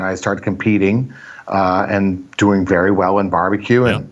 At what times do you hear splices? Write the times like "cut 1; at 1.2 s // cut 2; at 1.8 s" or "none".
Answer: none